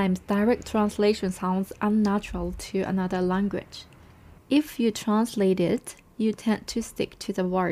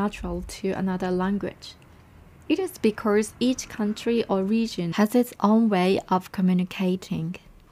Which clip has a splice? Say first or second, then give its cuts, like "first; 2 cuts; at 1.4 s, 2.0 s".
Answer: first; 1 cut; at 4.4 s